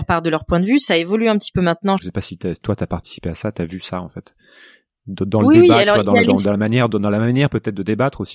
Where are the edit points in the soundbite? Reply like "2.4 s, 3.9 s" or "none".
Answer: 2.0 s